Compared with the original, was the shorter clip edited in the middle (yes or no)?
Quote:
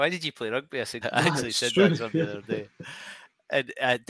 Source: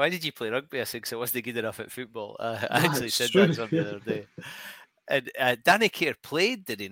yes